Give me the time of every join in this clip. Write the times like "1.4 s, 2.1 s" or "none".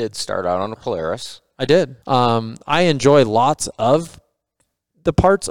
2.0 s

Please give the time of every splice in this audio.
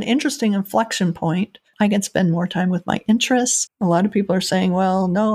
1.7 s, 3.7 s

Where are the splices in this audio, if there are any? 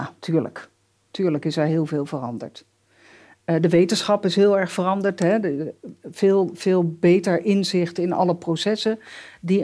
none

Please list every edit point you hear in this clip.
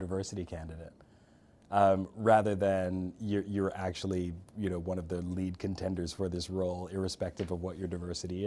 none

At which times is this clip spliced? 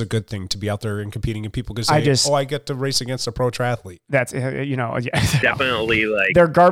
5.4 s

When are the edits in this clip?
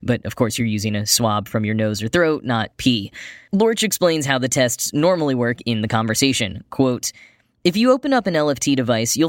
2.7 s

